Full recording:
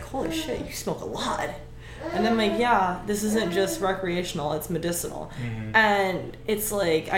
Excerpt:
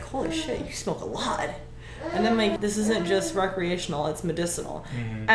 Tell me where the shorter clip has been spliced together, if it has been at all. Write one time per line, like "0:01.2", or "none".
0:02.6